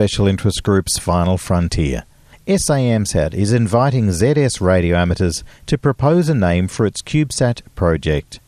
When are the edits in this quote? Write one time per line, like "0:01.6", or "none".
0:02.3